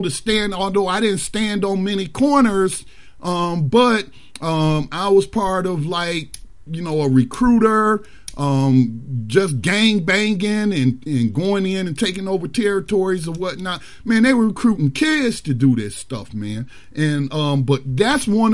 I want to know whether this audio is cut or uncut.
uncut